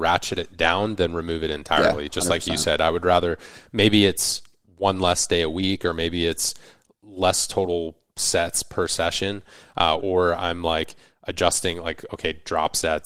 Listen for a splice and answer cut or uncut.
cut